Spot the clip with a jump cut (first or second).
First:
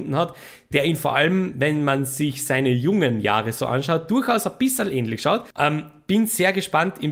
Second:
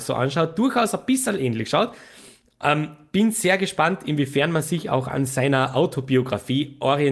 first